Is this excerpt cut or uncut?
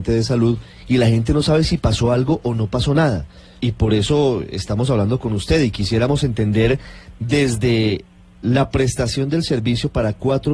cut